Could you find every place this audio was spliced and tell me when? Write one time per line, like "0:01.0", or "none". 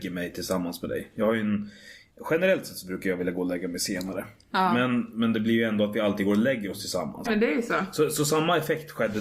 0:07.2